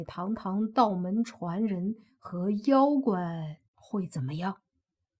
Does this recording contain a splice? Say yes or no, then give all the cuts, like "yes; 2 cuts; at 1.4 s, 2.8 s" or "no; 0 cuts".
yes; 1 cut; at 3.6 s